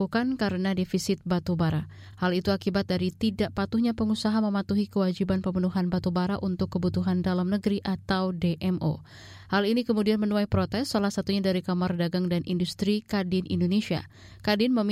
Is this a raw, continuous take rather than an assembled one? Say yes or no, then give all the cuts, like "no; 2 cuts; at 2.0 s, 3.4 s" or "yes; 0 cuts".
yes; 0 cuts